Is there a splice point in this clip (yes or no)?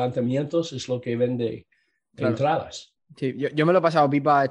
no